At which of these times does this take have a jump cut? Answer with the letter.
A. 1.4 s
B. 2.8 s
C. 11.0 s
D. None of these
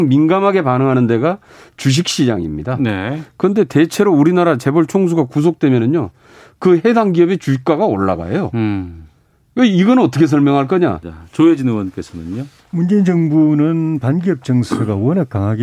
C